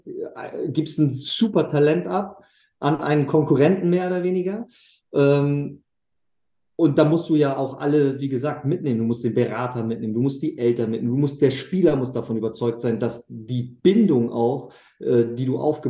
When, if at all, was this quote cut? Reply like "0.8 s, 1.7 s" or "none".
none